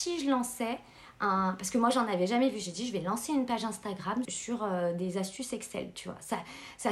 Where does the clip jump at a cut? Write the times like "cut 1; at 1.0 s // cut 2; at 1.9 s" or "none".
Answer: cut 1; at 4.2 s